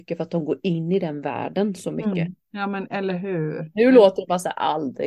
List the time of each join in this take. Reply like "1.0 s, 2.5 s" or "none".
2.5 s